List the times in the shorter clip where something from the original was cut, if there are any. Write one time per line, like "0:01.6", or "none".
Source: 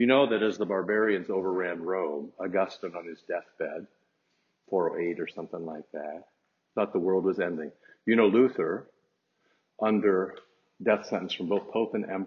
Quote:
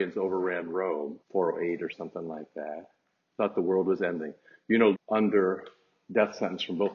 0:01.2
0:04.9